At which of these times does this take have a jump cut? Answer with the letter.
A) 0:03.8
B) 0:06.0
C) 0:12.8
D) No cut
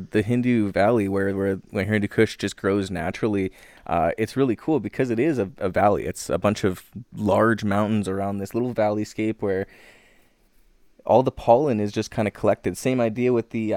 D